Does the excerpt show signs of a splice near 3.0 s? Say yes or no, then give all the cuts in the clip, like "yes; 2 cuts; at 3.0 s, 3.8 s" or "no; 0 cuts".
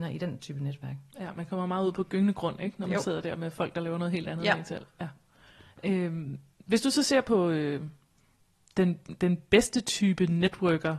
no; 0 cuts